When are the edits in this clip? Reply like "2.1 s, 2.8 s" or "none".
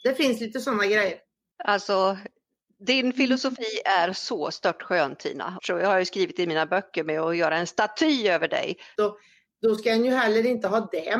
5.6 s, 9.0 s